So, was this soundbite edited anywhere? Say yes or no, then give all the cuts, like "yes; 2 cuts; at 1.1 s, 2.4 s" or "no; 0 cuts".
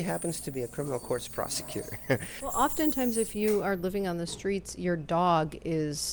yes; 1 cut; at 2.4 s